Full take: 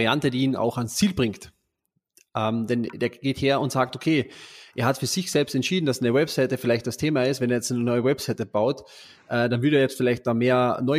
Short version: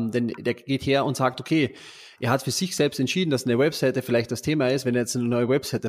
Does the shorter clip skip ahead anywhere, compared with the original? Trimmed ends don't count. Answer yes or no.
no